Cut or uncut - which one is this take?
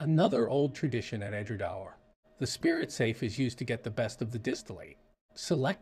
uncut